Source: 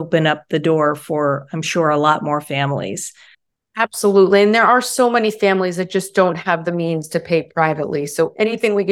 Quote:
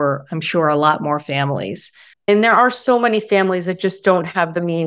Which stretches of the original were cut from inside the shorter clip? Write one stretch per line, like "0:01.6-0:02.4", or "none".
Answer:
0:03.5-0:04.4